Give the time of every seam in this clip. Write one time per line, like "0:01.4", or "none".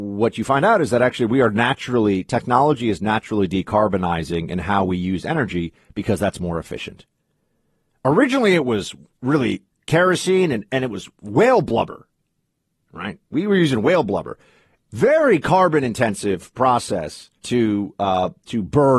0:14.8
0:17.4